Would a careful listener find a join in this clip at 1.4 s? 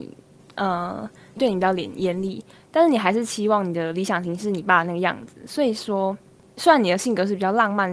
yes; 1 cut; at 1.4 s

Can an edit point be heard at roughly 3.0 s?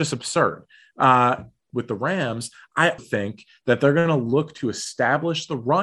yes; 2 cuts; at 1.7 s, 3.0 s

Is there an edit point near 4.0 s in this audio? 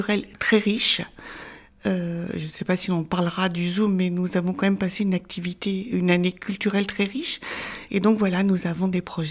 no; 1 cut; at 7.9 s

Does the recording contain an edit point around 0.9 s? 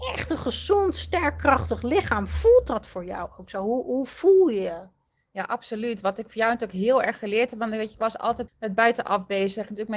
no; 1 cut; at 8.5 s

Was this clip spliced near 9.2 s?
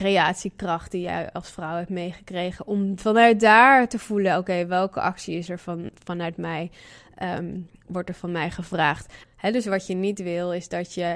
yes; 1 cut; at 9.2 s

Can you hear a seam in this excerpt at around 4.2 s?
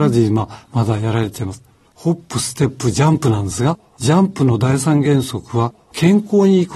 no; 1 cut; at 1.9 s

